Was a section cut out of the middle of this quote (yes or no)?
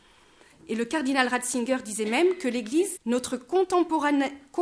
yes